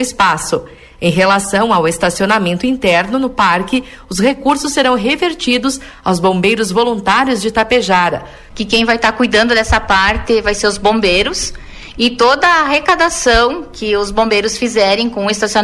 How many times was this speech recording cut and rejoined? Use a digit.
1